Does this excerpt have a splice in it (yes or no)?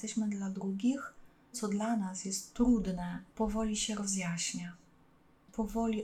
yes